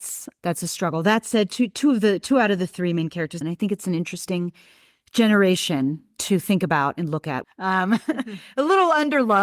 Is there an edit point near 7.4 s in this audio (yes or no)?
yes